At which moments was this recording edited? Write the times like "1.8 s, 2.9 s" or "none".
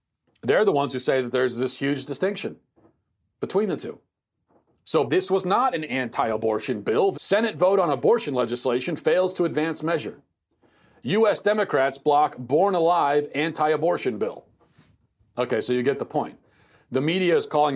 5.1 s, 7.1 s